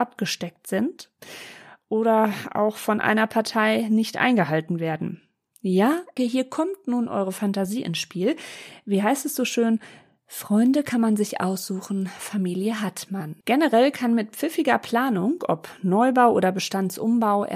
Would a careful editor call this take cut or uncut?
cut